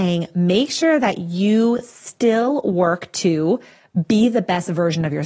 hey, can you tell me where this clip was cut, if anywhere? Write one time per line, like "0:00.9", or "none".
none